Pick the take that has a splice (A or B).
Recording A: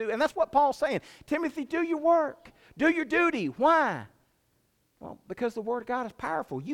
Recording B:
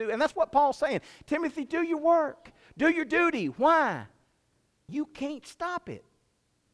B